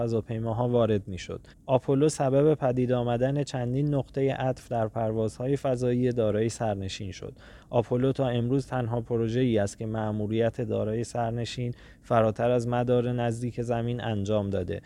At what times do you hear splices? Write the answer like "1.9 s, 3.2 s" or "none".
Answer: 1.5 s

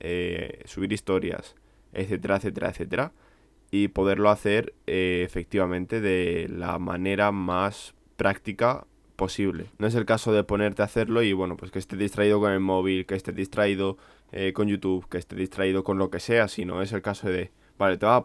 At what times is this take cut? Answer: none

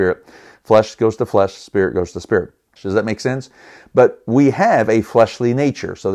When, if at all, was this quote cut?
2.8 s

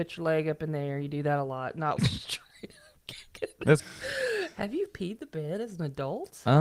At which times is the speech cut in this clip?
2.0 s, 3.8 s

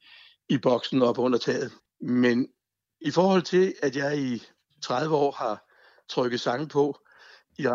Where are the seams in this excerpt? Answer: 1.9 s

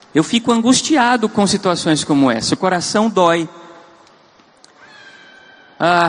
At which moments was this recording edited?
none

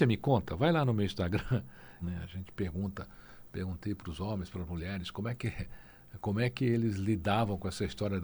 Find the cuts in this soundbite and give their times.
2.0 s

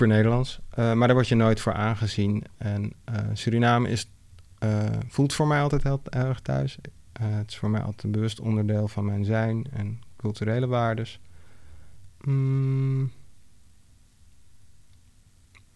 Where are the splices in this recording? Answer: 12.1 s

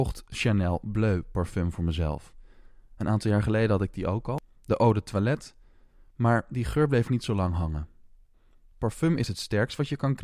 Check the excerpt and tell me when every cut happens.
none

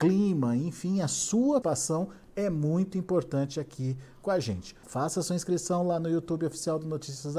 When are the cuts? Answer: 1.6 s, 4.8 s

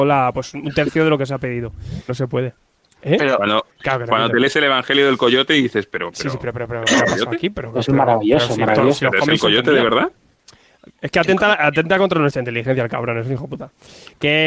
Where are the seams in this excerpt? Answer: 2.1 s

